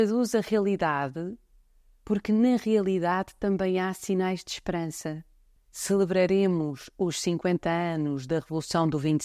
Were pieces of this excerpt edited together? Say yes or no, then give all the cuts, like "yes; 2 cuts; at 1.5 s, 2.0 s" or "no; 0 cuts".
yes; 1 cut; at 5.6 s